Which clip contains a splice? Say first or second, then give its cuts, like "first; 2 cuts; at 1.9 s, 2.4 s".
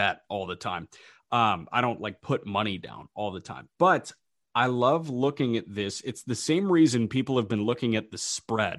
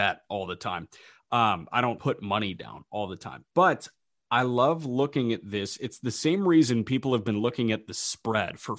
second; 1 cut; at 2.0 s